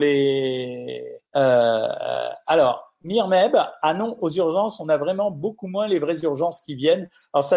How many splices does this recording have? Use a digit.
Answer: 1